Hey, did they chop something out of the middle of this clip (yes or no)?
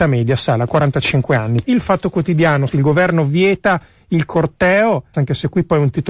yes